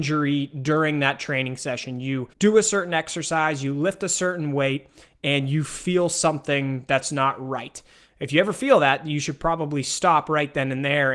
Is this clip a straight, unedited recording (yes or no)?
no